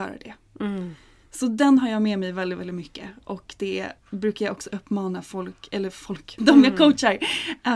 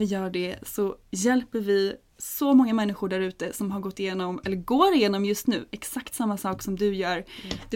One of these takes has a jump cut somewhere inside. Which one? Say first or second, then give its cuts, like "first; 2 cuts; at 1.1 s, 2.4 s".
first; 2 cuts; at 4.0 s, 6.4 s